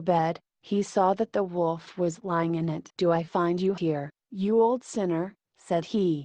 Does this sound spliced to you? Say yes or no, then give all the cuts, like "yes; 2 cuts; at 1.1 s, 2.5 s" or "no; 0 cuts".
no; 0 cuts